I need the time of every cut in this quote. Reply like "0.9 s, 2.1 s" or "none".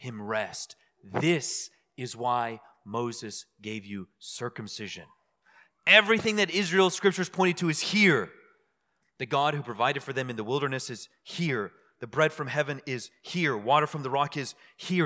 none